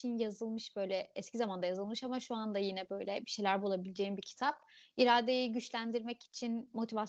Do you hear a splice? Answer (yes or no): no